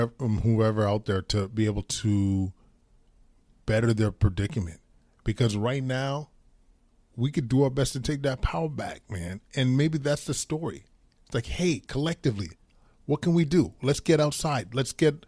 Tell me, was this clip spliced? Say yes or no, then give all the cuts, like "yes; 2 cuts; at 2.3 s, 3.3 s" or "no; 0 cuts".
no; 0 cuts